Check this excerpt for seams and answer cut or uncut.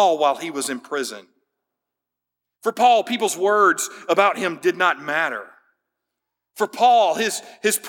uncut